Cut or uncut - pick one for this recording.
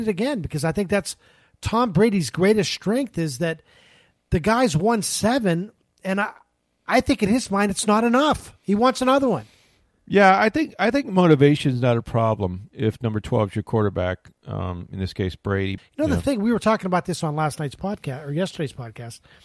cut